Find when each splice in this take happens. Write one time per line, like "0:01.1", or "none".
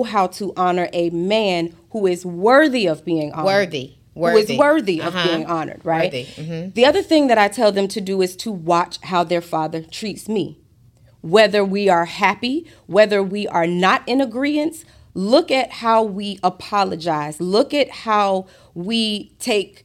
none